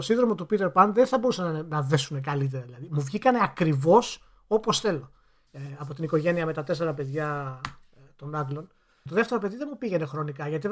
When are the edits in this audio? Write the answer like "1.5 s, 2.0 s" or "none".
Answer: 5.5 s, 9.1 s